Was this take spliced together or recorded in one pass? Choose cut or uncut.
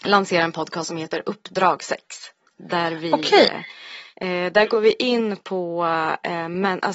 uncut